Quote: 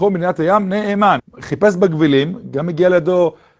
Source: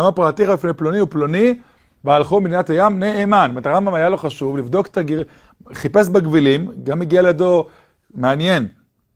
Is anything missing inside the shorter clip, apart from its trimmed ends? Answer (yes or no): yes